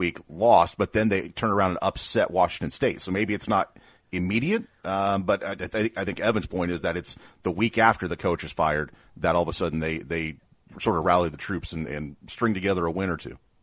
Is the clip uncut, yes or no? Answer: yes